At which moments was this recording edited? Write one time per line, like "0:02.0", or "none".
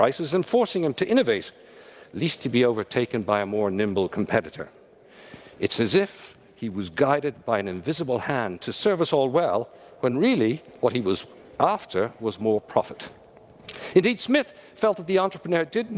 none